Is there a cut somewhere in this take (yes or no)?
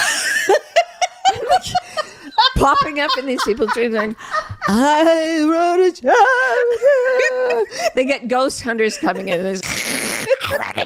yes